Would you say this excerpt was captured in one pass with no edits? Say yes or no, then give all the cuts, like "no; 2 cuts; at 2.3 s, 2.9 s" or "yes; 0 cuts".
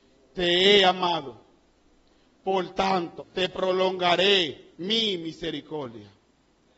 no; 2 cuts; at 3.2 s, 4.7 s